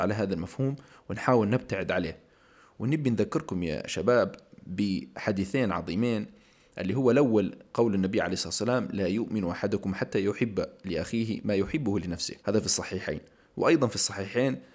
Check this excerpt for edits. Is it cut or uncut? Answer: cut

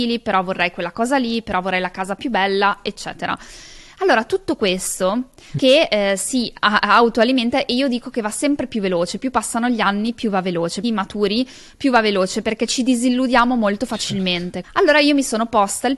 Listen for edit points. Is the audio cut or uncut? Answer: cut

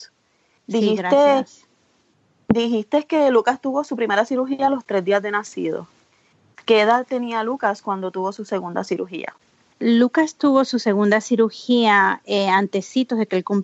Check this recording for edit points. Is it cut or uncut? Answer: uncut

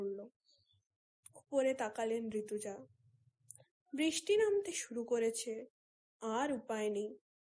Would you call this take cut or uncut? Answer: cut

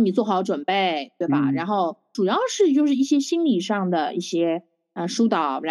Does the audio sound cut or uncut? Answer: uncut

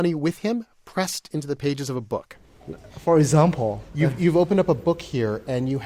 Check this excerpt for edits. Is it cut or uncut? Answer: uncut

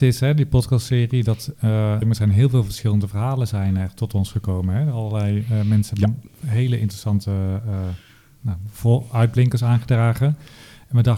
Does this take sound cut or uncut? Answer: cut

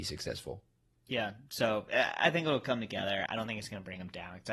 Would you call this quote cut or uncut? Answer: cut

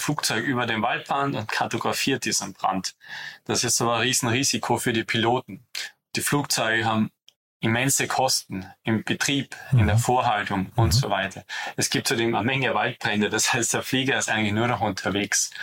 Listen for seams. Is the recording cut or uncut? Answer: uncut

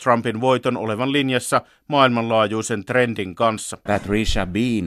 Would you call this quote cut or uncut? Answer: cut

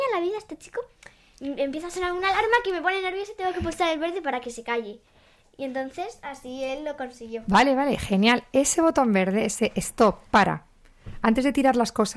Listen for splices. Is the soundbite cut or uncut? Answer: uncut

